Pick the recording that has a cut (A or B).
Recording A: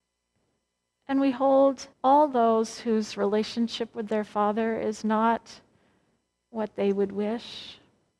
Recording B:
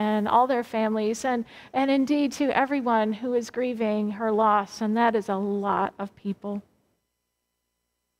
A